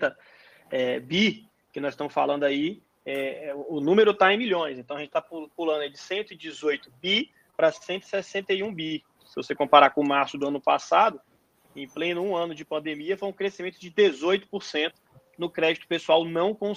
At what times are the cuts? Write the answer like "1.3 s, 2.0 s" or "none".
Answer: 9.2 s

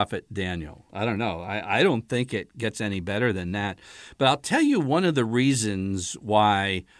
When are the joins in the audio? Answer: none

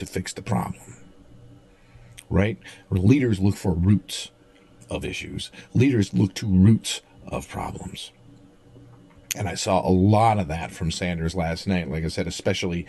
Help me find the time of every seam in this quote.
none

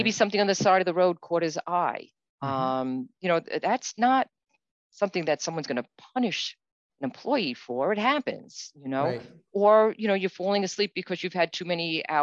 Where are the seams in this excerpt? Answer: none

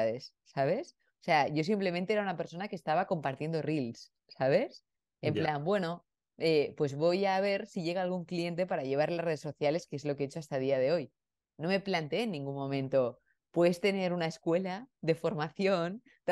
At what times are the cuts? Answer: none

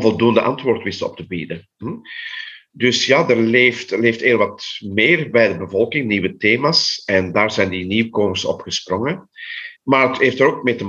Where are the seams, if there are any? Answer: 9.8 s

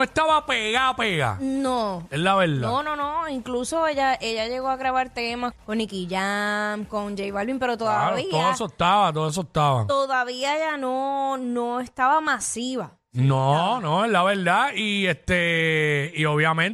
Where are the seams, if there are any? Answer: 5.5 s

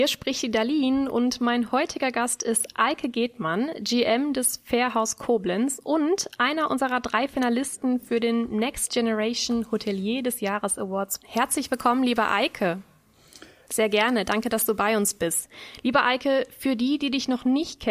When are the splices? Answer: 13.7 s

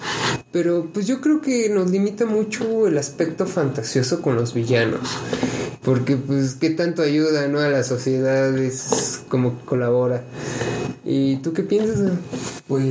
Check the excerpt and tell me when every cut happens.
5.8 s

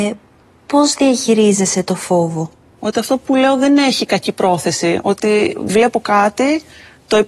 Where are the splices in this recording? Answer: 2.8 s

